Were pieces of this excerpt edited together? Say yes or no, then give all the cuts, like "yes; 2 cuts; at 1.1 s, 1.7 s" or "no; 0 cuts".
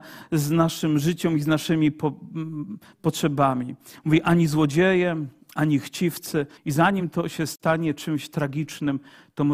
yes; 1 cut; at 6.6 s